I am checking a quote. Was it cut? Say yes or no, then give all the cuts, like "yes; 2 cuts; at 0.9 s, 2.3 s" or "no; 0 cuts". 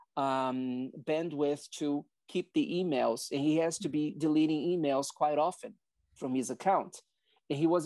no; 0 cuts